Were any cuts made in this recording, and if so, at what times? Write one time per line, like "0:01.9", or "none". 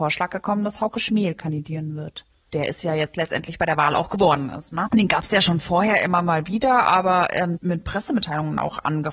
0:04.9
0:07.6